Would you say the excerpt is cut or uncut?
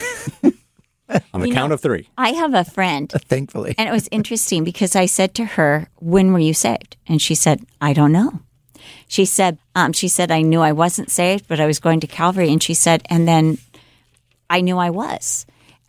cut